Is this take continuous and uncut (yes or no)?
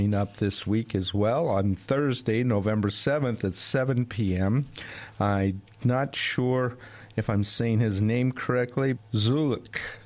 no